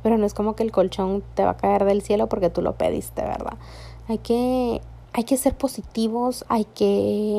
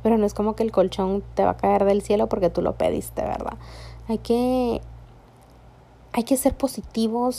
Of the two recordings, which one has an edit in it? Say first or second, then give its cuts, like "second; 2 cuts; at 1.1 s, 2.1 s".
first; 2 cuts; at 5.1 s, 6.4 s